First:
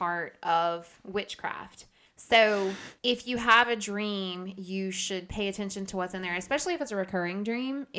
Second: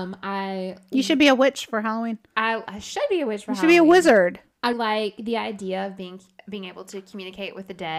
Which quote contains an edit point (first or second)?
second